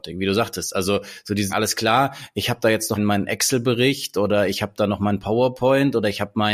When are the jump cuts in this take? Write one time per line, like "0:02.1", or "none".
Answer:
0:01.5
0:03.0